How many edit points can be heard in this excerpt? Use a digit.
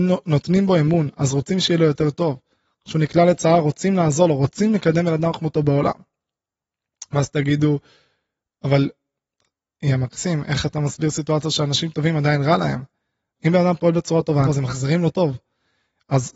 2